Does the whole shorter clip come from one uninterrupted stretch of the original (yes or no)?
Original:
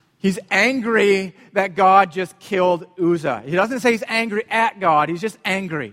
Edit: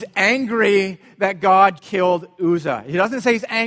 no